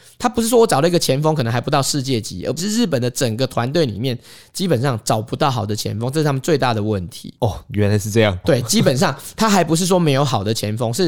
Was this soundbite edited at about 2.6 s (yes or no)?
yes